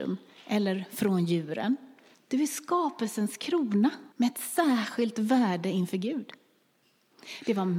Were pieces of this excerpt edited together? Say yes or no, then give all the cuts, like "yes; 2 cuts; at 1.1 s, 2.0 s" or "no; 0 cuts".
yes; 2 cuts; at 2.1 s, 4.1 s